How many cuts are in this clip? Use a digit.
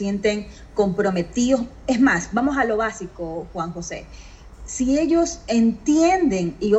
0